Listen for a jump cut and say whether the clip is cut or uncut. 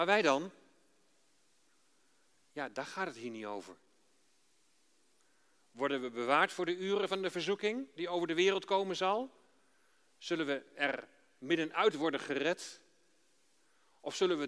uncut